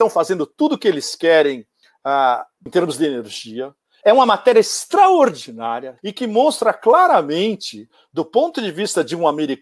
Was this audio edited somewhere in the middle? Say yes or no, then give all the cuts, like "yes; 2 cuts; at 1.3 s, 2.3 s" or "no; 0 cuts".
yes; 3 cuts; at 2.7 s, 4.0 s, 6.0 s